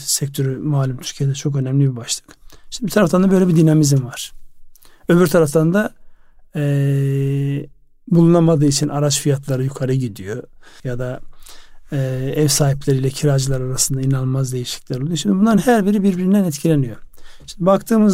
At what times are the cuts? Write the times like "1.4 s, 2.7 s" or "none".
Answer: 10.8 s

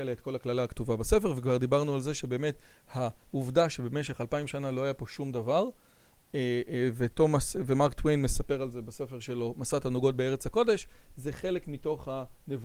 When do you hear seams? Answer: none

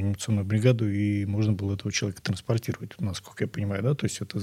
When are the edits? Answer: none

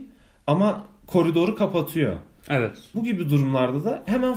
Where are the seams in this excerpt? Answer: 2.9 s

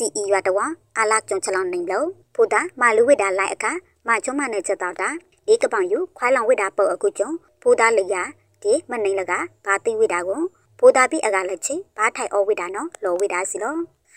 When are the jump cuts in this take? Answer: 1.2 s

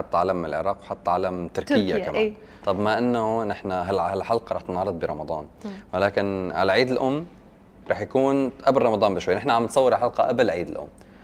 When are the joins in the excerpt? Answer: 2.6 s

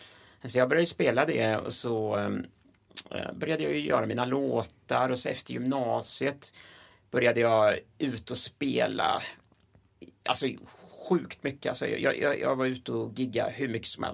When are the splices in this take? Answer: none

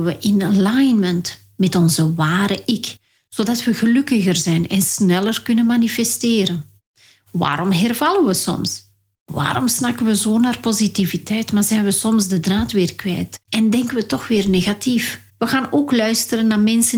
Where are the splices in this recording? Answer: 13.4 s, 15.3 s

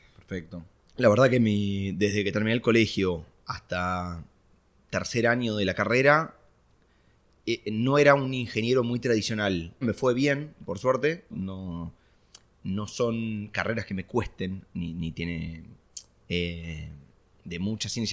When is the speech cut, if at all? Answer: 9.8 s, 11.3 s, 16.2 s

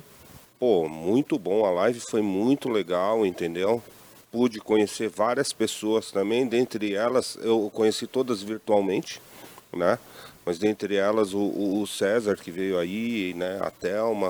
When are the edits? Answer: none

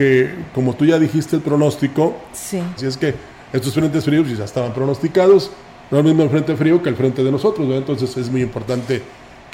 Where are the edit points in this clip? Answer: 2.8 s

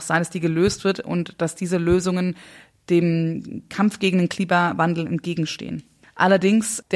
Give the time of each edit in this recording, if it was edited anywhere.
none

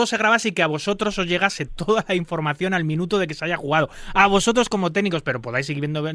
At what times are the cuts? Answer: none

